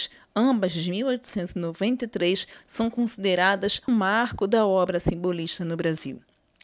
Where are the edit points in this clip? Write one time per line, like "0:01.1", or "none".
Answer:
0:03.9